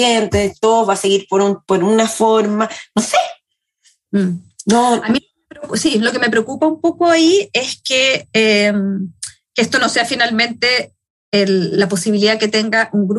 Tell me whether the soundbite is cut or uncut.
cut